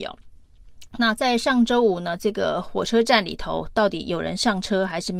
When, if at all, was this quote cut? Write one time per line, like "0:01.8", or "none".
none